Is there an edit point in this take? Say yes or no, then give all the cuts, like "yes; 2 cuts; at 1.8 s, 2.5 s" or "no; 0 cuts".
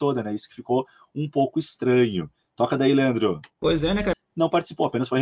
yes; 1 cut; at 4.1 s